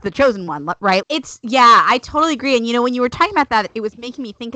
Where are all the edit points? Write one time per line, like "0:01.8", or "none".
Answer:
0:01.0